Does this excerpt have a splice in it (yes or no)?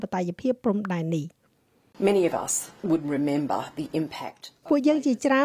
no